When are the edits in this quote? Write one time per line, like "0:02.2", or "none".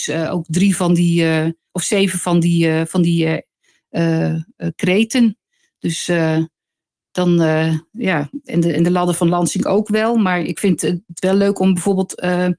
none